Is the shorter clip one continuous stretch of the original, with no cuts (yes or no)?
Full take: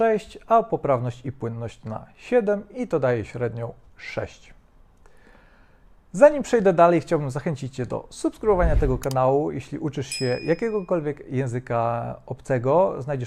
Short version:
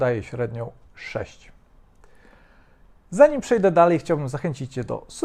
yes